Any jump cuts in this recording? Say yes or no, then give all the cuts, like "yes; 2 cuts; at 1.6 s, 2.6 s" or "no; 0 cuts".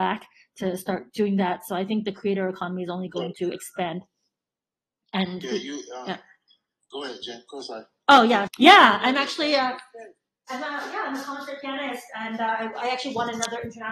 yes; 1 cut; at 8.5 s